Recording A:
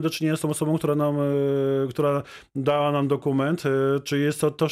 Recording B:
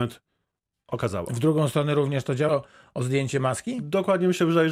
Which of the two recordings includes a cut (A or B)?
B